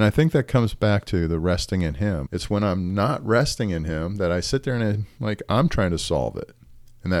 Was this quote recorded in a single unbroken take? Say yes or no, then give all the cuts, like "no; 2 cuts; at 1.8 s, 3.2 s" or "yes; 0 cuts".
no; 1 cut; at 2.3 s